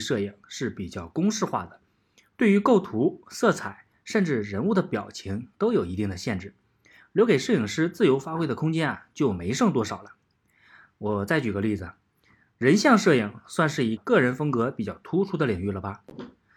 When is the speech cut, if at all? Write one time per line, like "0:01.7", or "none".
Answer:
0:10.9
0:14.0